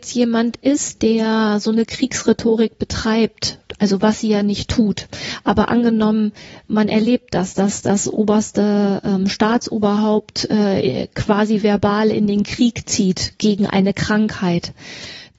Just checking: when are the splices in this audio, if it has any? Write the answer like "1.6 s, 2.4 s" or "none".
none